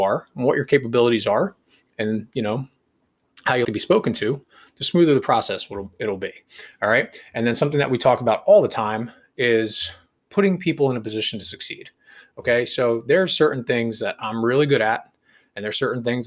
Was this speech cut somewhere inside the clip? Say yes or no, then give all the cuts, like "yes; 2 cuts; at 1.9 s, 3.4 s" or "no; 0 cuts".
yes; 1 cut; at 3.6 s